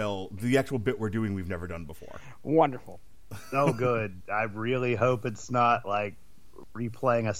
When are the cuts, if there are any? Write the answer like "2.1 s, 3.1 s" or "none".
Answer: none